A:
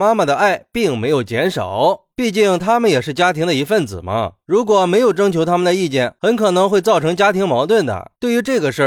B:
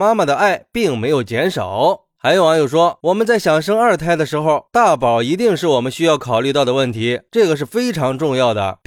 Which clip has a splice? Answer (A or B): A